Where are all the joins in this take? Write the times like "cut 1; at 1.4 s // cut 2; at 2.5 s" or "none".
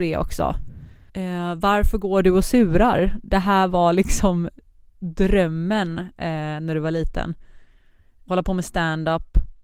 cut 1; at 1.1 s